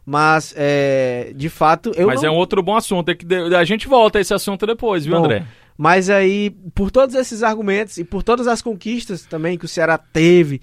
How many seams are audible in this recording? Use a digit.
0